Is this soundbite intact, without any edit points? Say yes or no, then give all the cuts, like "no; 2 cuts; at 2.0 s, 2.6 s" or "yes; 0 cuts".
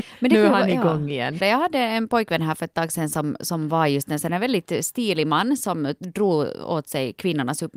no; 1 cut; at 1.4 s